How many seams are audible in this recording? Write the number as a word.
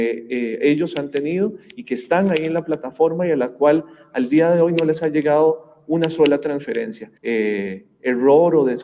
one